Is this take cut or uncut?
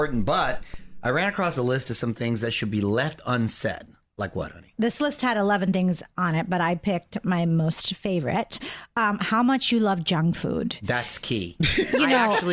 uncut